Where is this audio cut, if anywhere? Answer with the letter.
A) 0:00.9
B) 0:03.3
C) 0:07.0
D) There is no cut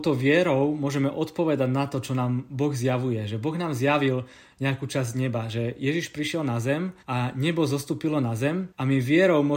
C